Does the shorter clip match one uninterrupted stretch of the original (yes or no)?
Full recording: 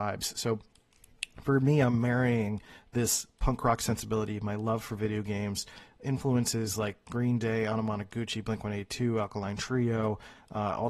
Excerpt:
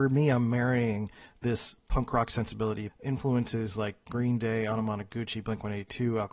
no